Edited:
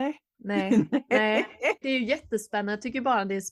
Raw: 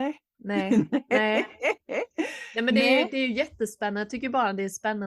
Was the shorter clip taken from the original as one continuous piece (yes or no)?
no